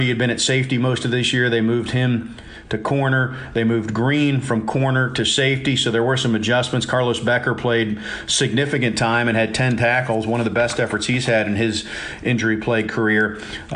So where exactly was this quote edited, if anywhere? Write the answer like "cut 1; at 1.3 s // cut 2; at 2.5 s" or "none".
none